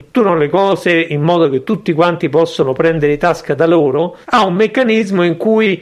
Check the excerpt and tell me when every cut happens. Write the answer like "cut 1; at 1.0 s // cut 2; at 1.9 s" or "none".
cut 1; at 4.2 s